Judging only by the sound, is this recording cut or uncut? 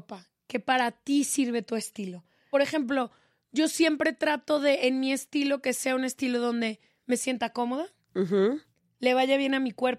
uncut